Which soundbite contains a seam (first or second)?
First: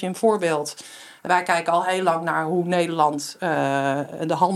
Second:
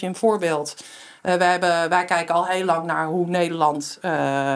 first